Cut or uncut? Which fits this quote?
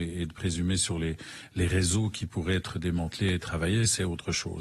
uncut